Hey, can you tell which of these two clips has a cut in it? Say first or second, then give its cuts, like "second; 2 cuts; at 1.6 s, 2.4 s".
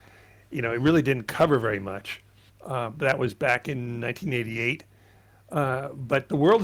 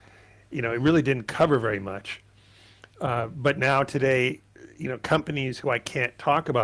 first; 1 cut; at 2.5 s